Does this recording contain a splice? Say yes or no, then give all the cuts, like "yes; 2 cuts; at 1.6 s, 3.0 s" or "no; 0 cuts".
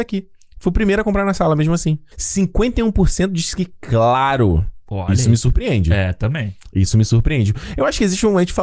yes; 1 cut; at 2.1 s